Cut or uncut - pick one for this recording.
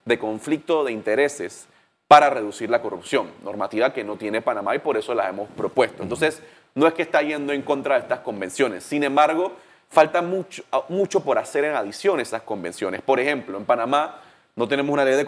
uncut